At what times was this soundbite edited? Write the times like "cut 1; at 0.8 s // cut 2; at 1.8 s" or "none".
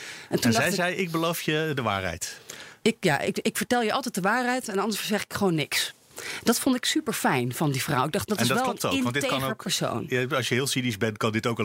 none